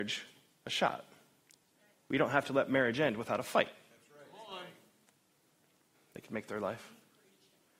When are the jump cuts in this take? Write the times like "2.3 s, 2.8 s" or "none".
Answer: 5.9 s